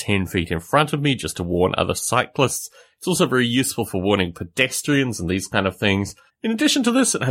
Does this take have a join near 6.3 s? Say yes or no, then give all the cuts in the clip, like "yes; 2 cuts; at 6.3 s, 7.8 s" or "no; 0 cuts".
yes; 1 cut; at 6.3 s